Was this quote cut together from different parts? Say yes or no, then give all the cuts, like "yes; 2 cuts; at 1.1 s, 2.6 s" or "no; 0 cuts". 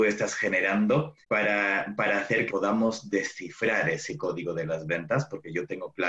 yes; 2 cuts; at 1.2 s, 2.5 s